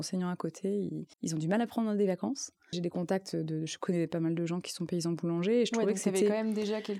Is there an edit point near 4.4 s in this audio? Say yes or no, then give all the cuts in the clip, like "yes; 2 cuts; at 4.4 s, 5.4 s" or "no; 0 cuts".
no; 2 cuts; at 1.1 s, 2.7 s